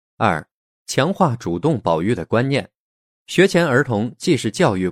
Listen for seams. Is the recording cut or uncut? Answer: uncut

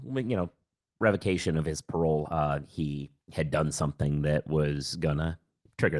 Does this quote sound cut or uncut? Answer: uncut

